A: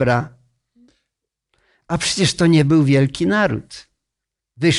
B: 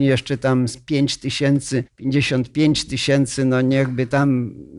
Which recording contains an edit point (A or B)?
B